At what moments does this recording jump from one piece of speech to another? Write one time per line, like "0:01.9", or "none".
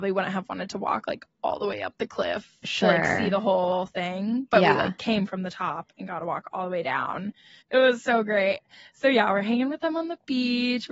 0:07.6